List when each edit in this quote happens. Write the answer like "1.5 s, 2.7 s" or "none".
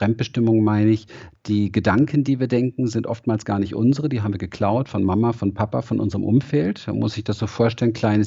none

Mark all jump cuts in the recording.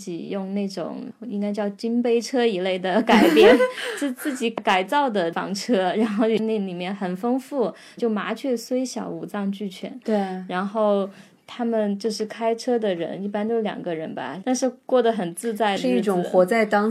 8.0 s, 14.4 s

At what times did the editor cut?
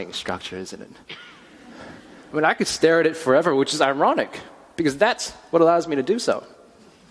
none

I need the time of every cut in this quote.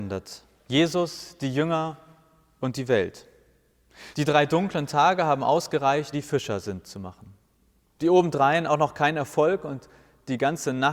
4.1 s, 6.1 s

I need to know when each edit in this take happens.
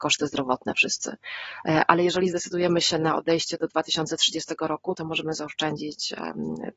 1.6 s

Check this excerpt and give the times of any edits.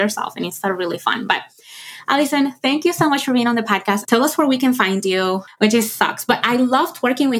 4.0 s, 5.5 s

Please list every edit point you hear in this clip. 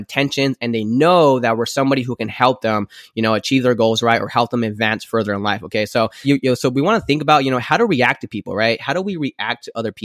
6.2 s

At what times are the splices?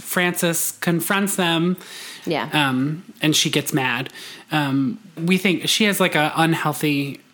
2.2 s, 5.2 s

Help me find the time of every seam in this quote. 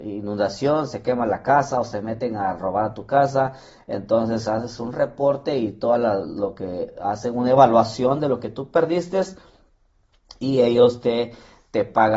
none

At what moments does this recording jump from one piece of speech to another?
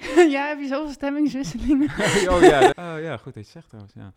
2.7 s

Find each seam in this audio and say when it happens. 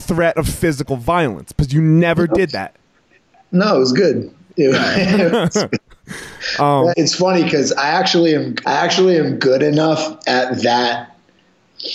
6.9 s, 8.6 s

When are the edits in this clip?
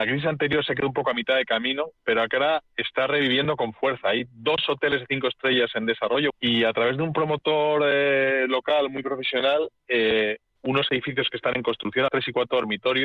6.3 s, 10.6 s, 12.1 s

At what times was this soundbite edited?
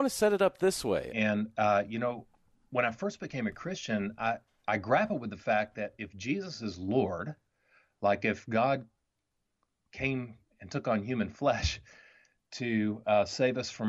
1.1 s

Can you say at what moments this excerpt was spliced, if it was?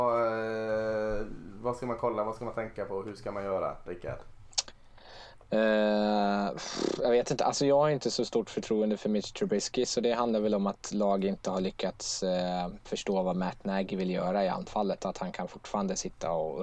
none

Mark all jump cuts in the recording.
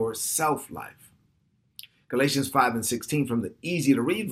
none

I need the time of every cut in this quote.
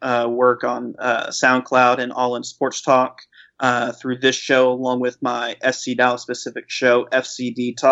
none

